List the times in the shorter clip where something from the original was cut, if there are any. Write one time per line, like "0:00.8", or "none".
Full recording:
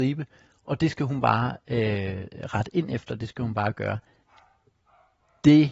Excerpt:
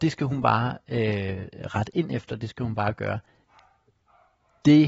none